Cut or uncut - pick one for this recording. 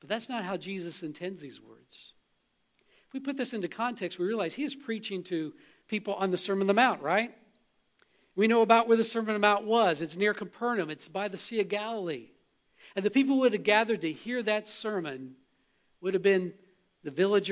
uncut